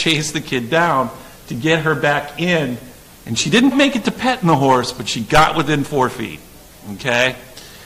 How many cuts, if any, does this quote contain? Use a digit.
1